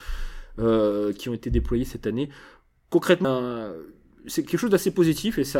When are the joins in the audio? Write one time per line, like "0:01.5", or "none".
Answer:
0:03.2

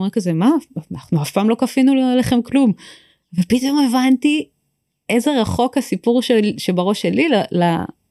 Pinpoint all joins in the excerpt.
none

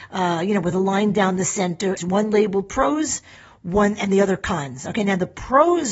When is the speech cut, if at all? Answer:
0:02.0

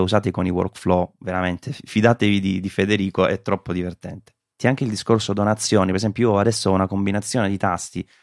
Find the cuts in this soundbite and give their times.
0:04.6

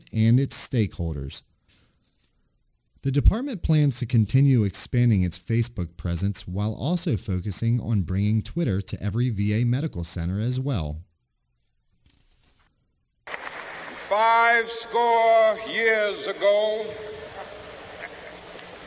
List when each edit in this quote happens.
0:13.2

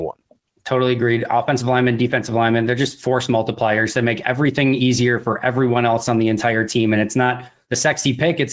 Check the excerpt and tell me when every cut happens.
none

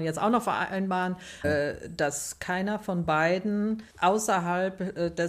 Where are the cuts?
0:01.4
0:03.9

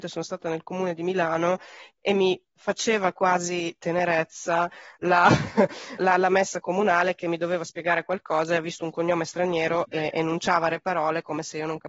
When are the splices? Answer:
0:02.5
0:06.0
0:09.9

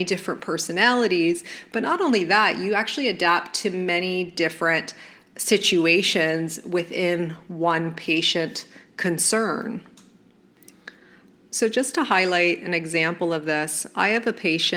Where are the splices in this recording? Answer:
none

